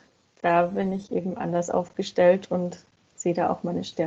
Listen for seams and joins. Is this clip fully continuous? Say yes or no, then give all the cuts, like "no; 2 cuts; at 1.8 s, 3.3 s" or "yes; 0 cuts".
yes; 0 cuts